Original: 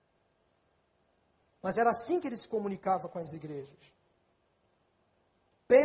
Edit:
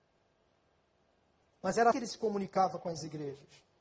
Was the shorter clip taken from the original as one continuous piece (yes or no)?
no